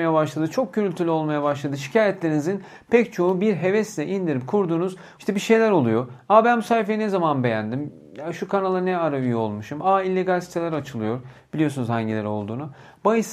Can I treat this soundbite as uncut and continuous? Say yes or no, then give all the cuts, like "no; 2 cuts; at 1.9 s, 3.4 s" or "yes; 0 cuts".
no; 1 cut; at 5.2 s